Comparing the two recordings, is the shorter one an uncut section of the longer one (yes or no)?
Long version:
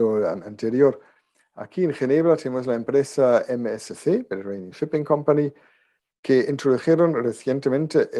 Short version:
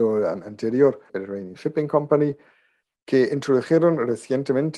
no